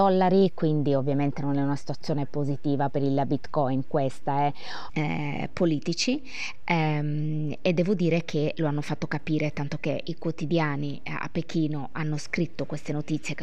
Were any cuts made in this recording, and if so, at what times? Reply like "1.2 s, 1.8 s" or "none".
4.9 s